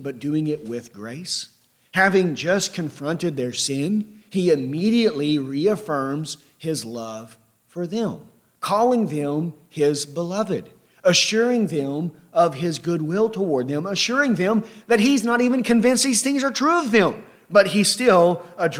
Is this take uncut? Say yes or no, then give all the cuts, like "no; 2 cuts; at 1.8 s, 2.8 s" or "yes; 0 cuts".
yes; 0 cuts